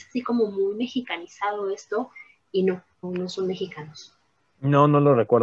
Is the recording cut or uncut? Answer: cut